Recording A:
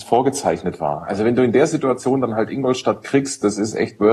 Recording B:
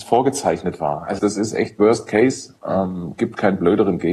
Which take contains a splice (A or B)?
B